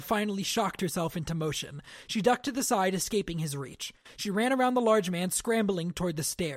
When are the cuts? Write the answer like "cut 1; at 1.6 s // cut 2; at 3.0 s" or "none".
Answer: none